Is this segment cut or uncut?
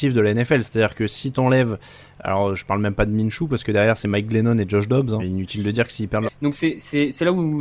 cut